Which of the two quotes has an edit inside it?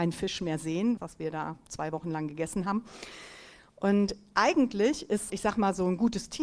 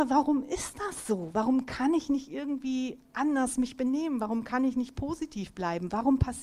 first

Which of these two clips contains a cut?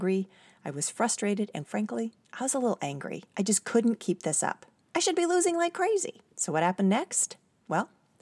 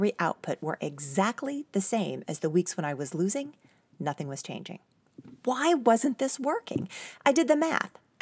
first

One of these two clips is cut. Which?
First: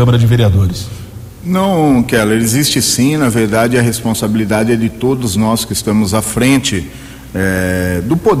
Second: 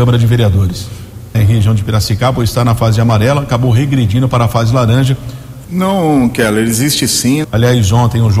second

